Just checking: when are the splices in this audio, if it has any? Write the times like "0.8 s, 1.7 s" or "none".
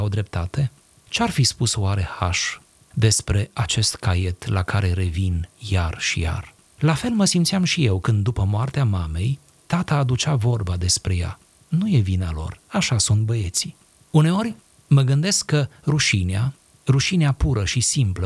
6.8 s